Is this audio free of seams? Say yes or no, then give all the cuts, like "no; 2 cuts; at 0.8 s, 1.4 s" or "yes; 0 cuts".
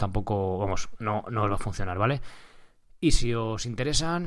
yes; 0 cuts